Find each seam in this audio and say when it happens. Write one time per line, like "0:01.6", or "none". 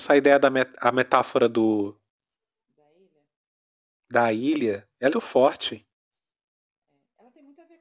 0:05.1